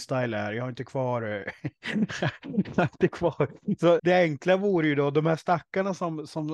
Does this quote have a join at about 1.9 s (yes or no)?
no